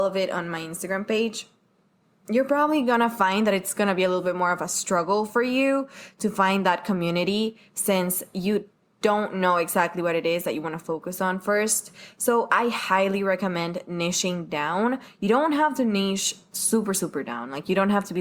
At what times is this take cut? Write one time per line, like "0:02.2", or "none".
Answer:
none

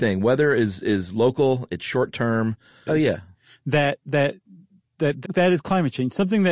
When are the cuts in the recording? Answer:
0:02.9
0:05.2

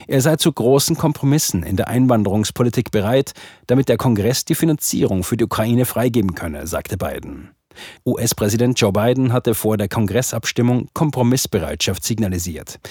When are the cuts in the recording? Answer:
0:08.0

